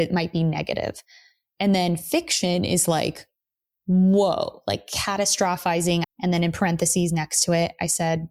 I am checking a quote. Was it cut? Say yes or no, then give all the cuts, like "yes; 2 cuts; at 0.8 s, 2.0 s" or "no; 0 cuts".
yes; 1 cut; at 6.0 s